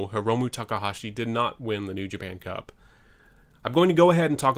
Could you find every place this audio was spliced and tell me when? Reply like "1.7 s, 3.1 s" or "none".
none